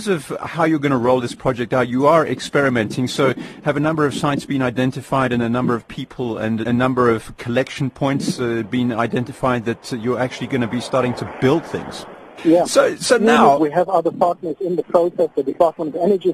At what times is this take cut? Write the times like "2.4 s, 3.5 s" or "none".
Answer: 6.6 s, 12.4 s, 13.6 s